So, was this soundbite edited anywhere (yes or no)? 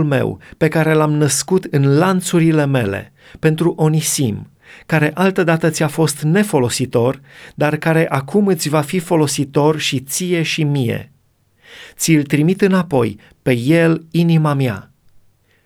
no